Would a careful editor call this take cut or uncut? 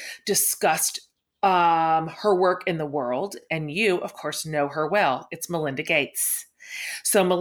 uncut